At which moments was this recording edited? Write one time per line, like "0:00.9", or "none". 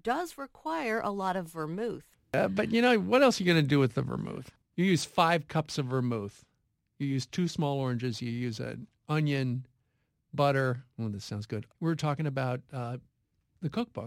0:11.7